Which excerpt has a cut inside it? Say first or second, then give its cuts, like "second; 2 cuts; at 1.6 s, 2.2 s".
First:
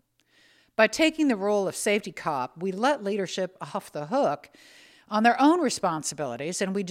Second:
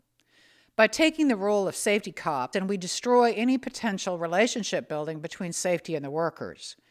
second; 1 cut; at 2.5 s